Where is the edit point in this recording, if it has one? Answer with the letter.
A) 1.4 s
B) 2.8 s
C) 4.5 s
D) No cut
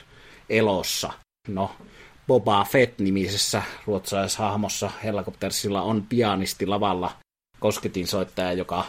A